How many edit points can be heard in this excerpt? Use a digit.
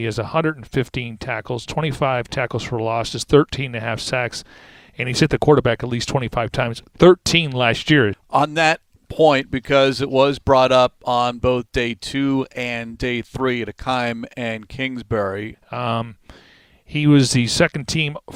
2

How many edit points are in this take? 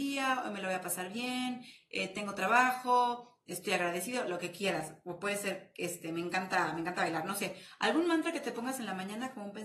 1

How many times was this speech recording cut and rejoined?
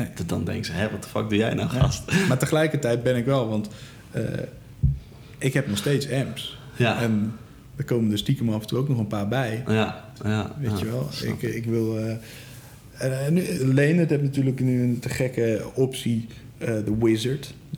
2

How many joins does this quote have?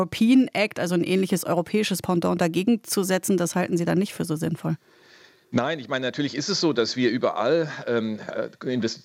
1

